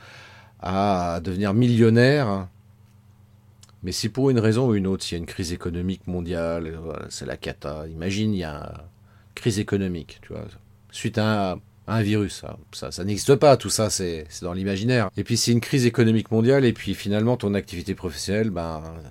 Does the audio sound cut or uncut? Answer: cut